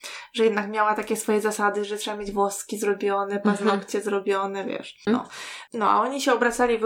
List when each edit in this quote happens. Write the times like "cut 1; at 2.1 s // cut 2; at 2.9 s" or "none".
cut 1; at 5.1 s